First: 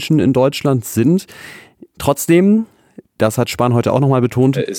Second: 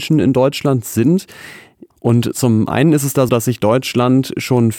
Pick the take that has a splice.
second; 2 cuts; at 1.9 s, 3.3 s

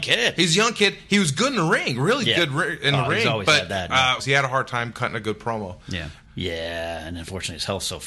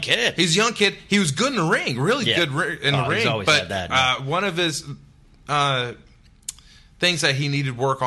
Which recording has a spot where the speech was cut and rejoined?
first; 2 cuts; at 4.2 s, 6.2 s

